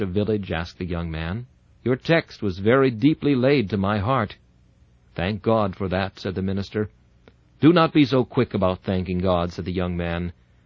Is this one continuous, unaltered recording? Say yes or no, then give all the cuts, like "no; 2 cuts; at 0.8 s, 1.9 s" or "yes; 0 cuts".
no; 1 cut; at 1.7 s